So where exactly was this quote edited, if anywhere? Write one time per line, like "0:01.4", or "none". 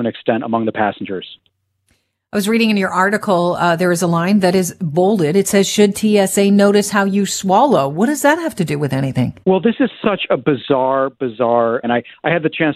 0:09.4
0:11.8